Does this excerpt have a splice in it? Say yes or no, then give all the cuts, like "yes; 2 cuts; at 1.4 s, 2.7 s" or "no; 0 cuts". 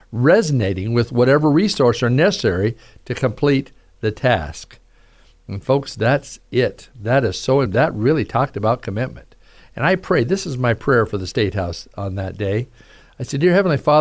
no; 0 cuts